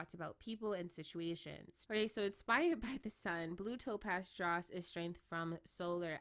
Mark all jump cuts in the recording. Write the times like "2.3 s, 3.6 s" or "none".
1.9 s